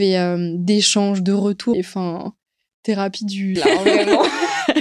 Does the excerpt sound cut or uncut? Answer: cut